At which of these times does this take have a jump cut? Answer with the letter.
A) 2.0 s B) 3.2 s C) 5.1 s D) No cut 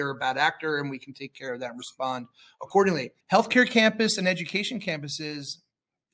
B